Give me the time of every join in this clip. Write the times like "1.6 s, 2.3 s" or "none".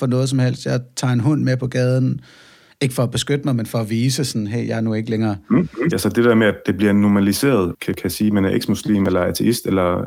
5.9 s, 7.7 s